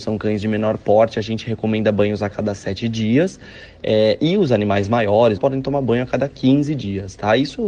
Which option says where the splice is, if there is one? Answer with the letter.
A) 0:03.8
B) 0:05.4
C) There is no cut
B